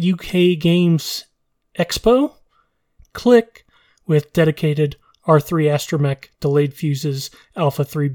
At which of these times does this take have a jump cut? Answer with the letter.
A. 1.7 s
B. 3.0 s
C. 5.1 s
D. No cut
B